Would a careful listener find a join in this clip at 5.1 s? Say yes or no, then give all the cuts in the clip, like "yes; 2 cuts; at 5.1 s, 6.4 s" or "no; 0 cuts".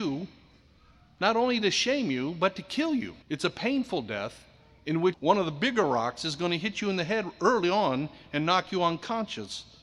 yes; 2 cuts; at 3.2 s, 5.1 s